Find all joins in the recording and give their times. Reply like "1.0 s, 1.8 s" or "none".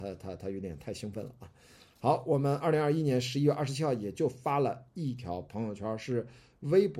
none